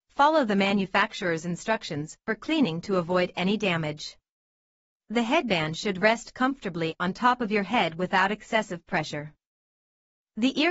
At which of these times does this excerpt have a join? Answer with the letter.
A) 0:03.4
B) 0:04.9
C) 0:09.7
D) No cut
B